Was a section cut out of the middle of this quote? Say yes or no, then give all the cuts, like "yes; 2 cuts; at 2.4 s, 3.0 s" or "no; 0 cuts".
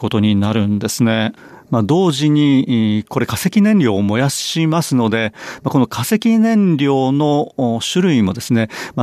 no; 0 cuts